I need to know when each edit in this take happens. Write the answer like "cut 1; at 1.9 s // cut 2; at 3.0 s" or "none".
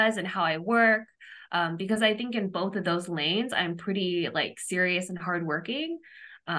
none